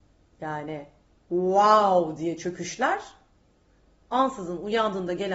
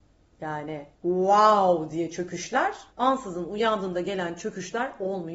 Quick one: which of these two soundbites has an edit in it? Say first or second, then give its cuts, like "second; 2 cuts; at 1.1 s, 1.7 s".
second; 2 cuts; at 0.9 s, 2.9 s